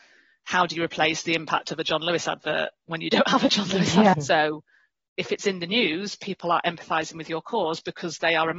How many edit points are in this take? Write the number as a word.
one